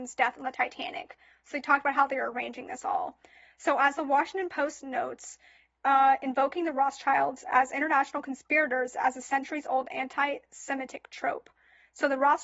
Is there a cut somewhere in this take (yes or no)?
no